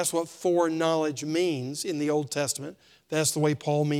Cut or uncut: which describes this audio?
uncut